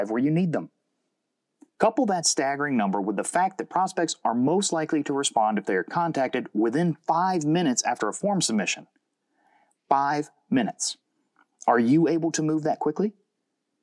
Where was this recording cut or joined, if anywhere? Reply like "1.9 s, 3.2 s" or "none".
1.7 s